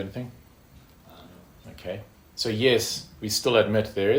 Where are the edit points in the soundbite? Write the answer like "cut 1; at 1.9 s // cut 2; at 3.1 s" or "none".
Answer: cut 1; at 1.6 s